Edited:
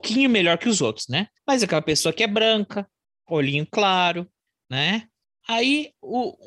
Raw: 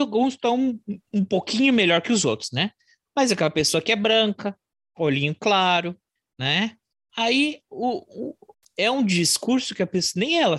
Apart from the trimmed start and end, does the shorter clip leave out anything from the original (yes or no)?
yes